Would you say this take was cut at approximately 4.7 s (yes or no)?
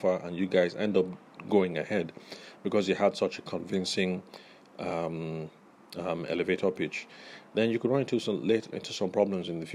no